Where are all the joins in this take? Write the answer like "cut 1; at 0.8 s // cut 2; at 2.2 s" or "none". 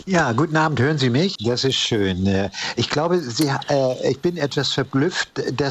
cut 1; at 1.4 s